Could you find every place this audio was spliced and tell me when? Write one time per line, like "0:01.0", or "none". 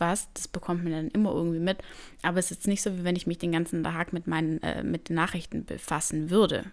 none